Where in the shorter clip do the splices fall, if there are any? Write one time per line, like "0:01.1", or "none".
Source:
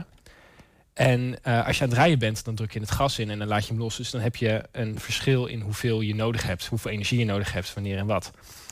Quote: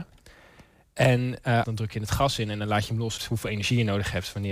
0:01.6
0:03.2